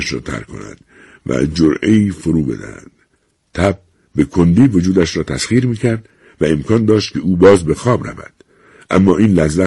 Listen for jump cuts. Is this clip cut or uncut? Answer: uncut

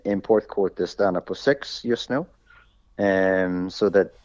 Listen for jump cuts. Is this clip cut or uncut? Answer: uncut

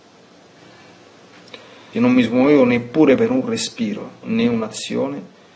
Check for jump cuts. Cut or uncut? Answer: cut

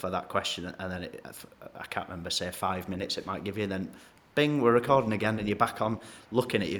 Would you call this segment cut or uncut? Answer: uncut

